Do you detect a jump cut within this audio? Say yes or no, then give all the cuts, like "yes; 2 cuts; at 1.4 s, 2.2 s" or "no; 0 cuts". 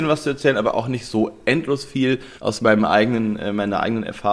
yes; 1 cut; at 2.4 s